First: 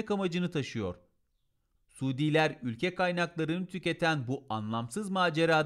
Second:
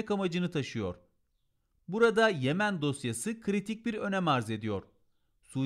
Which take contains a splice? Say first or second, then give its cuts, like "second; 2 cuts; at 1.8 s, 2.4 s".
first; 1 cut; at 1.8 s